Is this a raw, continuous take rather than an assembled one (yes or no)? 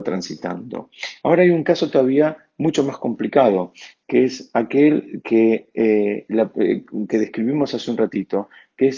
yes